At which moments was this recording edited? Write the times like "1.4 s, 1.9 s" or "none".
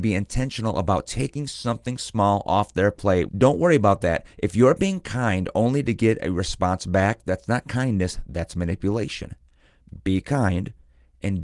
3.3 s